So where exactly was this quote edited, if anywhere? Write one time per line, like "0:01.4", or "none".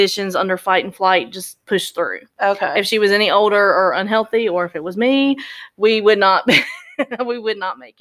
none